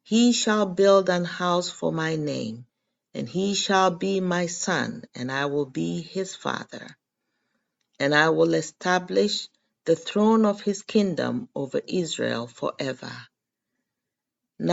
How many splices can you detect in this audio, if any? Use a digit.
0